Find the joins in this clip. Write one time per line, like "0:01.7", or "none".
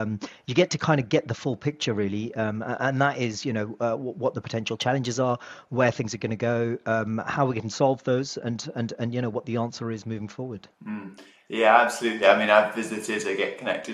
0:10.7